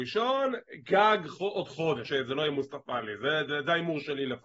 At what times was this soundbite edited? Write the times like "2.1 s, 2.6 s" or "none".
2.0 s